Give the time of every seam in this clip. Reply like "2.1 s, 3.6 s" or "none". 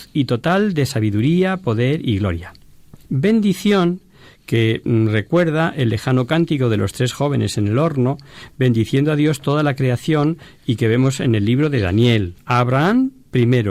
3.0 s, 12.4 s